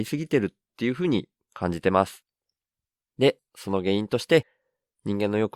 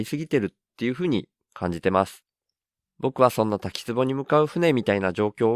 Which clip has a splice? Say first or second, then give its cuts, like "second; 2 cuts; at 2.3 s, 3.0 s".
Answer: second; 1 cut; at 2.9 s